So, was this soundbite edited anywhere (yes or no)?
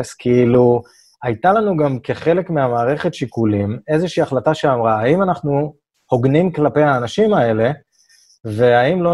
no